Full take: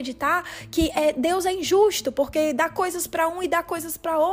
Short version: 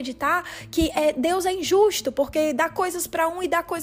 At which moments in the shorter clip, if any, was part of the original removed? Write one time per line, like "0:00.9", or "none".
none